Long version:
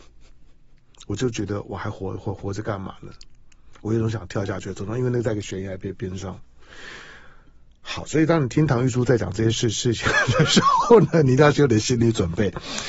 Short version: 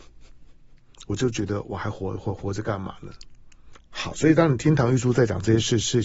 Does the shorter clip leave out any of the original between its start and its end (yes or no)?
yes